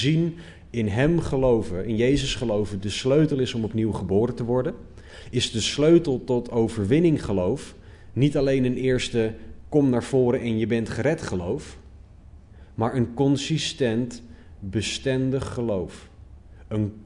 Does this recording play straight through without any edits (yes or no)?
yes